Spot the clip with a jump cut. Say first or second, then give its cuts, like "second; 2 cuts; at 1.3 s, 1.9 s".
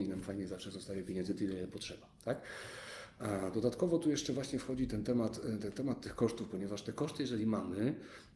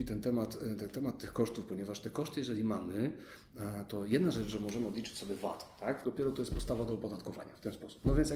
second; 1 cut; at 6.0 s